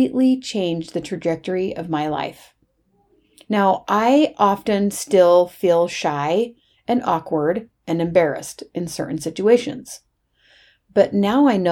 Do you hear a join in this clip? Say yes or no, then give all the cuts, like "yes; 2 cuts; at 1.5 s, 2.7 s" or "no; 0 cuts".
no; 0 cuts